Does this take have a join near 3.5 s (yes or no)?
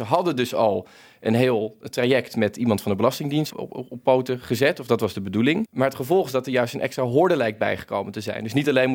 yes